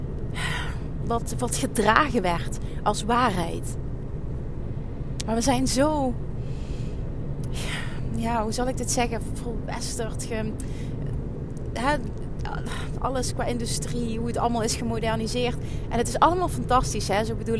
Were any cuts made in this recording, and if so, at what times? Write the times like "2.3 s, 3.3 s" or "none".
none